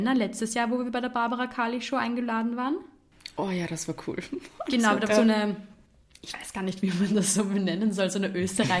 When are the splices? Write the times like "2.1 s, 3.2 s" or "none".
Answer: 5.1 s